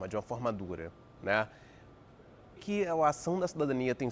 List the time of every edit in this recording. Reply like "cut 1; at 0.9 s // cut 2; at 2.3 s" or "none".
cut 1; at 2.6 s